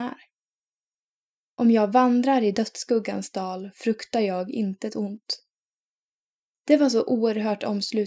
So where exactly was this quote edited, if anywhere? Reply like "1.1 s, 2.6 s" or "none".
6.5 s

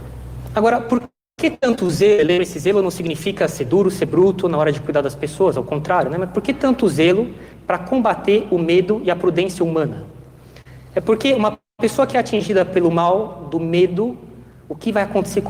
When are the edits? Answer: none

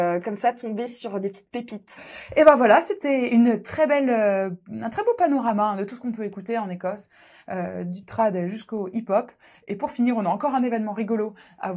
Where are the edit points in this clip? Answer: none

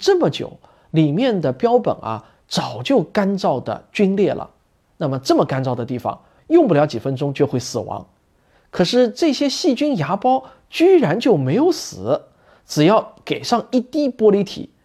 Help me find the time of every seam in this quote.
6.4 s

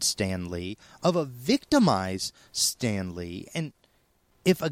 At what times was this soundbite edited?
none

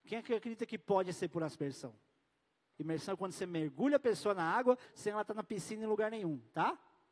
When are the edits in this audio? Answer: 2.7 s, 4.9 s

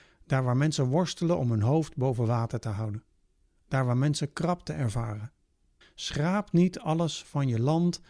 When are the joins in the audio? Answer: 5.8 s

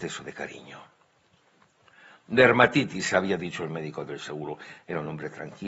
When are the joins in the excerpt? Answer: none

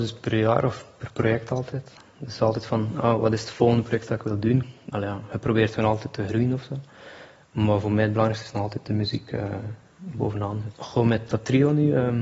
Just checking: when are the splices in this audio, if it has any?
4.9 s, 10.7 s

